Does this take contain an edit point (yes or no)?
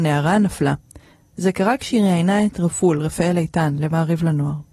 no